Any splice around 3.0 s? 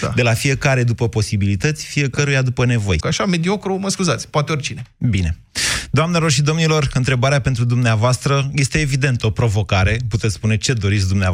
yes; 1 cut; at 3.0 s

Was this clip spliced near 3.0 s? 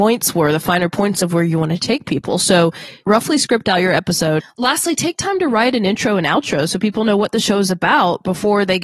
yes; 2 cuts; at 3.0 s, 4.4 s

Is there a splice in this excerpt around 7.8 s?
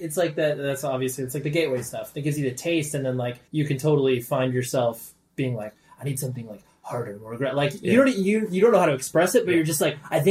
no; 1 cut; at 3.5 s

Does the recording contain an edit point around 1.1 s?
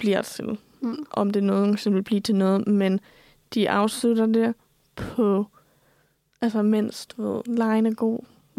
no; 0 cuts

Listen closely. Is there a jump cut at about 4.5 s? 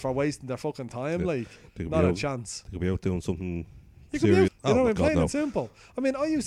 yes; 1 cut; at 4.5 s

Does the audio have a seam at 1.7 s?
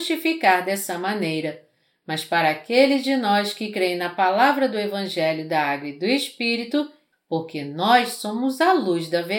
no; 1 cut; at 7.1 s

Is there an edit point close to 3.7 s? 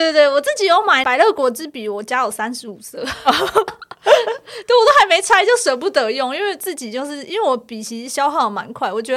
yes; 1 cut; at 3.7 s

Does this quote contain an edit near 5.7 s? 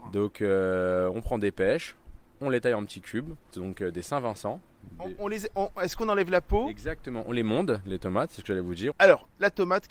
no; 2 cuts; at 3.5 s, 8.9 s

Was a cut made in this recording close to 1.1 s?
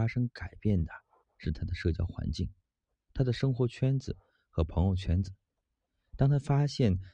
no; 0 cuts

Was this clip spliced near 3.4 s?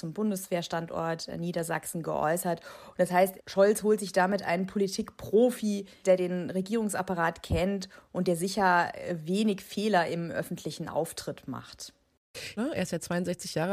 yes; 3 cuts; at 3.4 s, 6.0 s, 12.6 s

